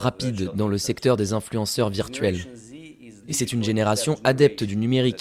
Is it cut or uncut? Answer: cut